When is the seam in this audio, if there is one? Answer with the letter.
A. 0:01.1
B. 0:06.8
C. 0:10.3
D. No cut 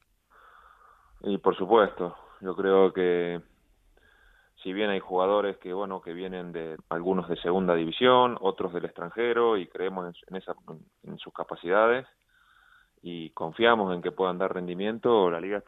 B